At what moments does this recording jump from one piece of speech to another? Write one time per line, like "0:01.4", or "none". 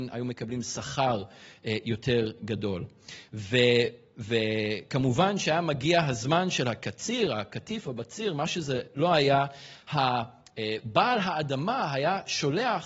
none